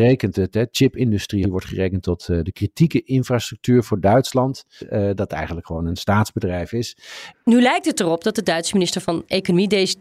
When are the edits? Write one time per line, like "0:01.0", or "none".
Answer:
0:01.4
0:04.8
0:07.3